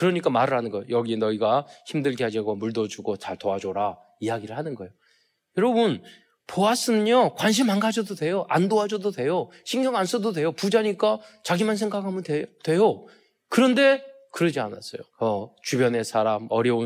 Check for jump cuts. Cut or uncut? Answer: cut